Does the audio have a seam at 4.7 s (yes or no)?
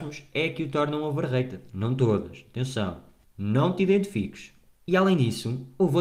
yes